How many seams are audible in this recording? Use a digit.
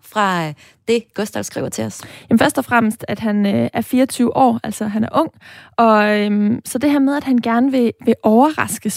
0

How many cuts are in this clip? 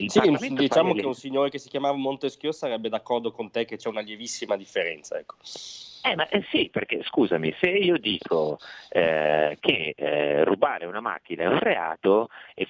0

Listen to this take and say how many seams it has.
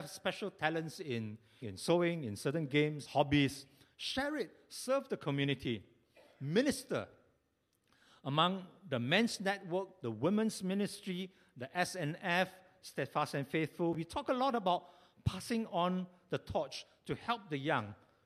2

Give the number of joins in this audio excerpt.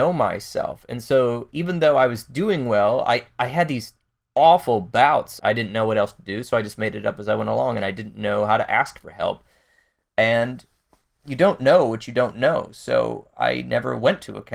1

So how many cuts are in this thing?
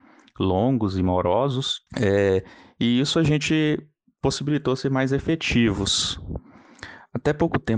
1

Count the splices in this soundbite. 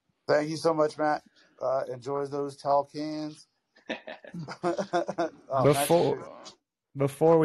0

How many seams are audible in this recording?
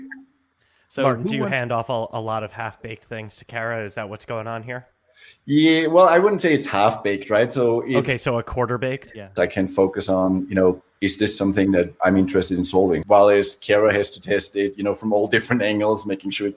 2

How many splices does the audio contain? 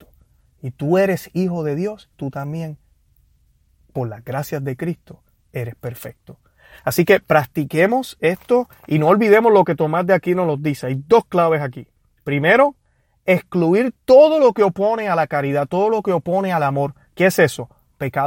1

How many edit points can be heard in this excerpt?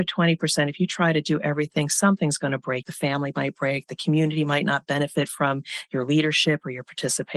1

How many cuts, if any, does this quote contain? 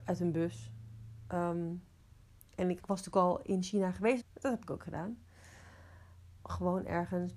3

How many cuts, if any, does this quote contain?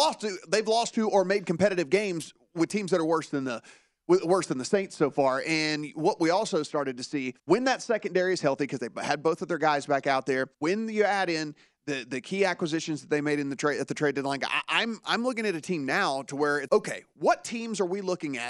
3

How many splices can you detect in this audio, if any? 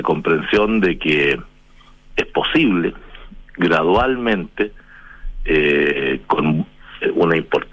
0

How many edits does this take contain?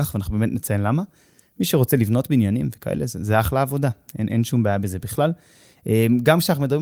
0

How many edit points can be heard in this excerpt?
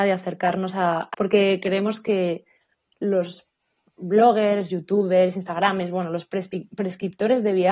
1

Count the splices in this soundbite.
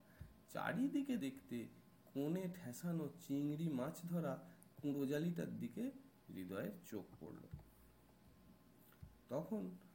1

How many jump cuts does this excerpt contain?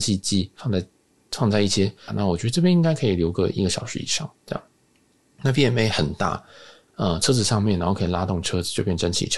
2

